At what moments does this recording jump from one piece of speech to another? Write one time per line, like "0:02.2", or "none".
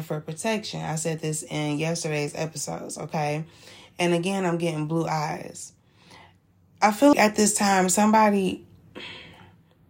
0:07.1